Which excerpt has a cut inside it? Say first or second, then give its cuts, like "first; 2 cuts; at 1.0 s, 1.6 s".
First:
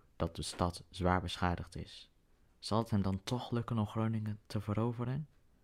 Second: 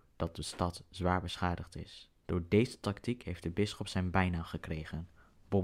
second; 1 cut; at 2.2 s